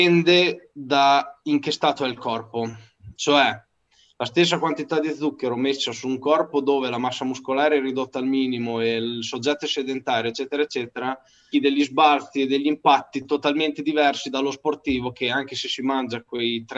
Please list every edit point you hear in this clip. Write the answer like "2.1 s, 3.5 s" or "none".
3.1 s, 11.5 s